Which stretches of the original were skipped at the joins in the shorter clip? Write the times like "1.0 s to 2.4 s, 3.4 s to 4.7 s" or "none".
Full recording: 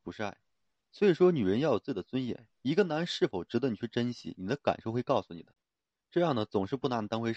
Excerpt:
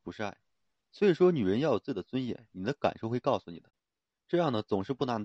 2.5 s to 4.3 s